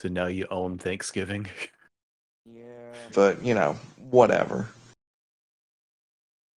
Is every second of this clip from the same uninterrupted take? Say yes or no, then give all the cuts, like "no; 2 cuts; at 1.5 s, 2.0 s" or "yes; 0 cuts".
no; 1 cut; at 3.1 s